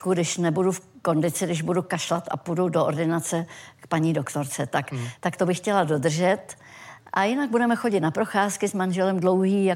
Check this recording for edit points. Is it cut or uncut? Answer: cut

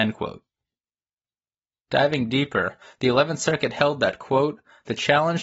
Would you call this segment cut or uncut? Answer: uncut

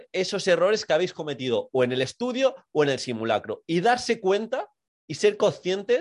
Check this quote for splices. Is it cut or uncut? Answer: uncut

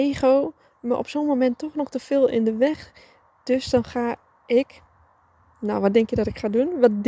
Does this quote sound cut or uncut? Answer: uncut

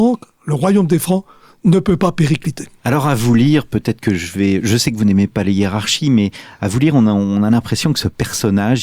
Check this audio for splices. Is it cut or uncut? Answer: cut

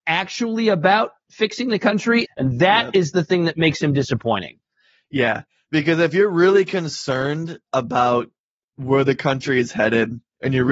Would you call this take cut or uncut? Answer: cut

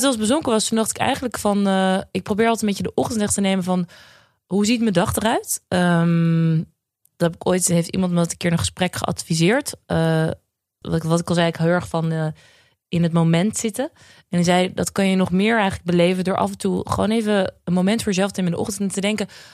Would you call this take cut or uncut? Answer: cut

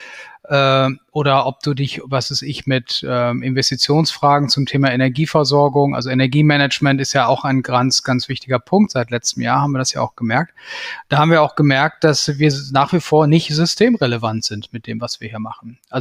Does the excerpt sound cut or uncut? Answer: uncut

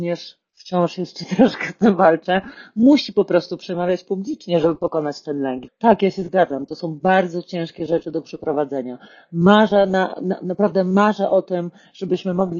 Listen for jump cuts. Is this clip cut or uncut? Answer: cut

